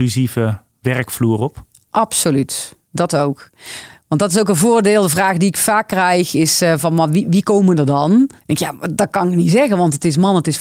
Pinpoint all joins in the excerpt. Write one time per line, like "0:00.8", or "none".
0:08.4